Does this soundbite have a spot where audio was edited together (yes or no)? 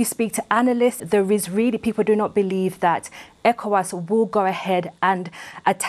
yes